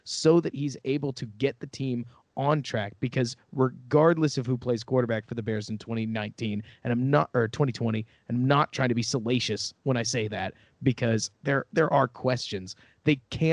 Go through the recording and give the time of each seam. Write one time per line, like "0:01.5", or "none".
none